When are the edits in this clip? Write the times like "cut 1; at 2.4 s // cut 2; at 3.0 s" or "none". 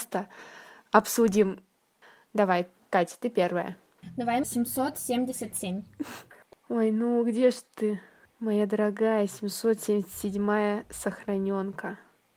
cut 1; at 4.4 s

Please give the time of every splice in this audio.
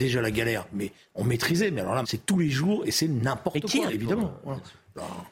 cut 1; at 2.0 s // cut 2; at 3.9 s

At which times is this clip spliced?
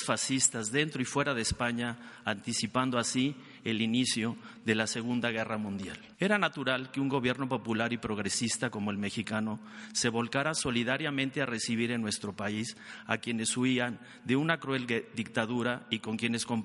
cut 1; at 6.1 s

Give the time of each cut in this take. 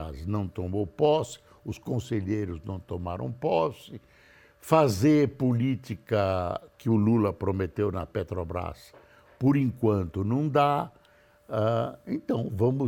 none

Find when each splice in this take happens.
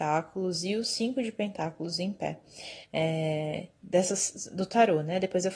none

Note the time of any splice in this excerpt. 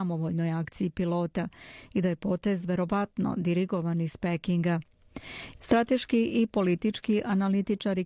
cut 1; at 5.6 s

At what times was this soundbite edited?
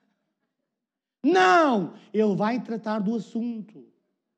none

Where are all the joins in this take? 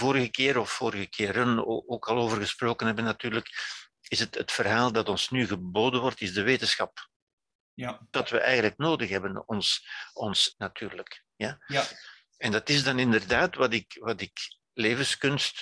cut 1; at 8.1 s // cut 2; at 10.5 s

